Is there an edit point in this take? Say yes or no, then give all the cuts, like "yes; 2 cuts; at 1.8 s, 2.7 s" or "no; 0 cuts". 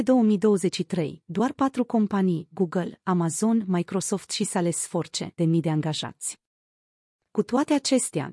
yes; 2 cuts; at 5.4 s, 7.2 s